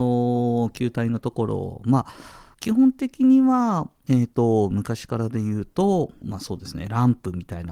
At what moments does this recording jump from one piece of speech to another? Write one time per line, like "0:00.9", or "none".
0:02.5
0:06.2